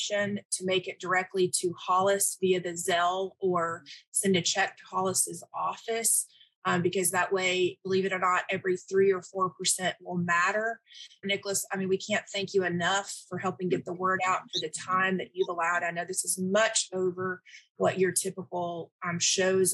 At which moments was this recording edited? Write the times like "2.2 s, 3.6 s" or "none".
11.2 s